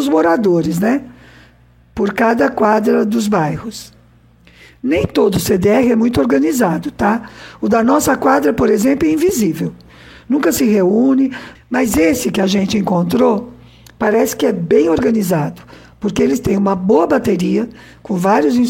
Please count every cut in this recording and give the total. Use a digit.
1